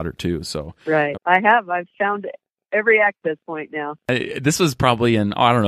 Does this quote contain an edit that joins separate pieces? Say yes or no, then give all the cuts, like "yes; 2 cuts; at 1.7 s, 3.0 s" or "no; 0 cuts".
yes; 1 cut; at 1.1 s